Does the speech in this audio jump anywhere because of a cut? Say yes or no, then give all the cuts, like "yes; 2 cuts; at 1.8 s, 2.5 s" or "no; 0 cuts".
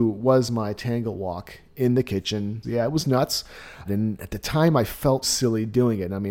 yes; 3 cuts; at 2.6 s, 3.9 s, 5.2 s